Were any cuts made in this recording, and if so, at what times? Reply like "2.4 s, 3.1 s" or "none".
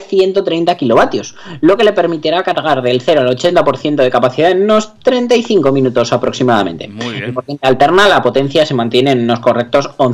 none